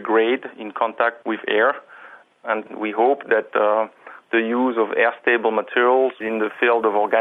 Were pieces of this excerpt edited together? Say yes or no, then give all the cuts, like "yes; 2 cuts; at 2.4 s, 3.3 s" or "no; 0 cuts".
no; 0 cuts